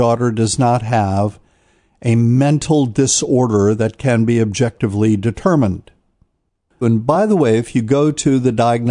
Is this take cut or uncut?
cut